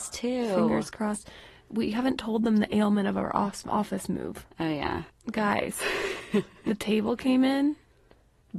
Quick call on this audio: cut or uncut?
uncut